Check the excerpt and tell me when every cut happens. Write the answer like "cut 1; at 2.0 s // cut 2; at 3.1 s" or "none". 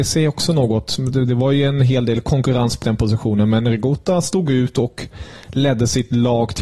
cut 1; at 2.8 s